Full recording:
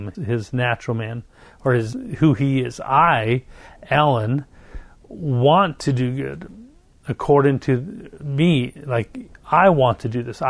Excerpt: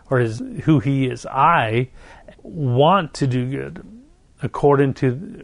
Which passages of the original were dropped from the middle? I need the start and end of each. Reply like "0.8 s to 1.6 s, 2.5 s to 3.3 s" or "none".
3.9 s to 5.0 s